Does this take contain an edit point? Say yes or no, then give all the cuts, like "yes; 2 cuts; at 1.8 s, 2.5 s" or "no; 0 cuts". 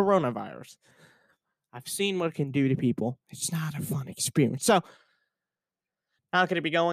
no; 0 cuts